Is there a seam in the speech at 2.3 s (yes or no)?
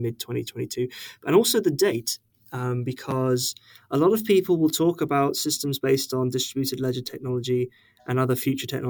no